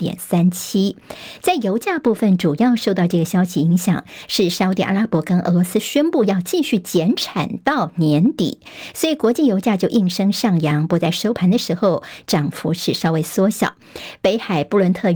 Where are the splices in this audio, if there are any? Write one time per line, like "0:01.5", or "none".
none

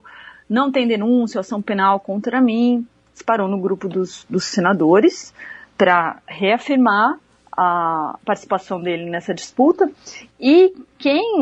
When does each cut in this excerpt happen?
0:04.3
0:10.3

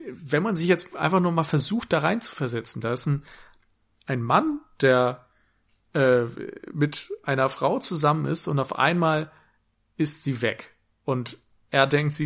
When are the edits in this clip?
none

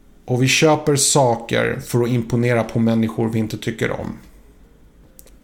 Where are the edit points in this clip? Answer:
none

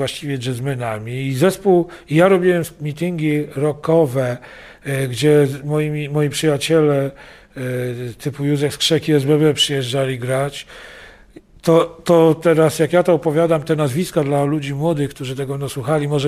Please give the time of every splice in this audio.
none

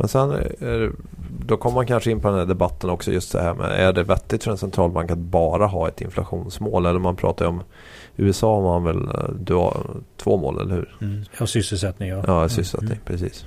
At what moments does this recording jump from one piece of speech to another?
0:11.3

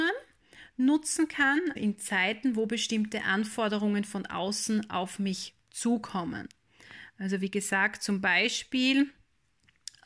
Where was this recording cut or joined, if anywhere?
0:01.8

